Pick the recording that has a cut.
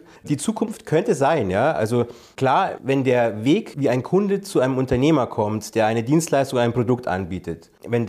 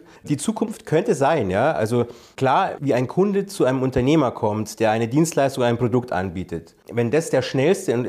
second; 1 cut; at 2.8 s

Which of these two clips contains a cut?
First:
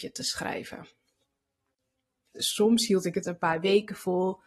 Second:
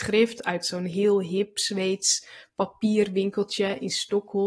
first; 1 cut; at 2.3 s

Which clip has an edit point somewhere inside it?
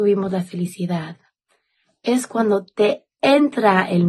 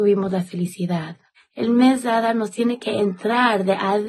second; 1 cut; at 1.4 s

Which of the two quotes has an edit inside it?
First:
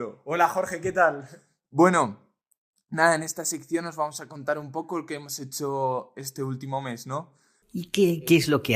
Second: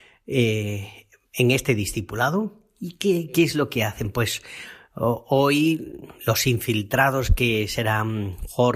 first; 1 cut; at 7.6 s

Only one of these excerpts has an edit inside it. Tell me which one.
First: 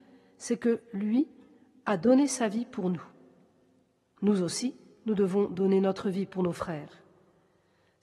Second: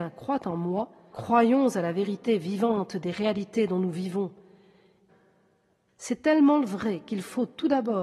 second; 2 cuts; at 1.1 s, 5.1 s

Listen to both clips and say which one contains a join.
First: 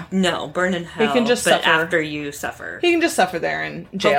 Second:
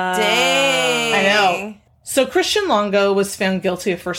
second; 1 cut; at 1.9 s

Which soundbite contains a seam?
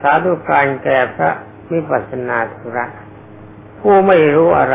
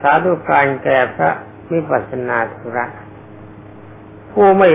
first; 1 cut; at 3.7 s

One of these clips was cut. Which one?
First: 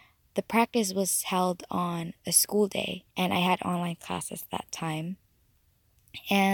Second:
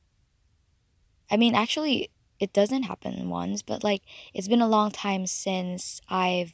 first; 1 cut; at 3.1 s

